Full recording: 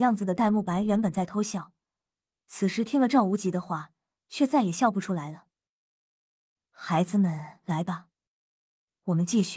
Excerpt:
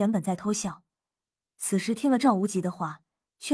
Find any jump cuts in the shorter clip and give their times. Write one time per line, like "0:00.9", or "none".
none